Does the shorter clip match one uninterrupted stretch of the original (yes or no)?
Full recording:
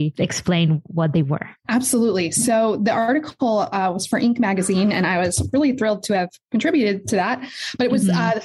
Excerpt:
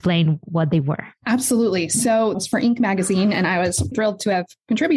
no